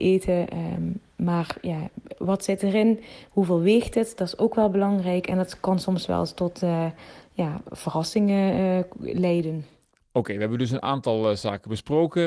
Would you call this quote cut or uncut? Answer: uncut